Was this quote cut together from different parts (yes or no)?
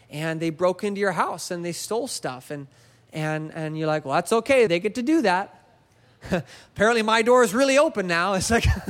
yes